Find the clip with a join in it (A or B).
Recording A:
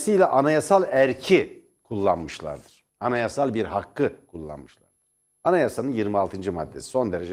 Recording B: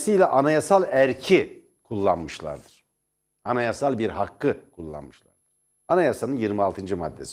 A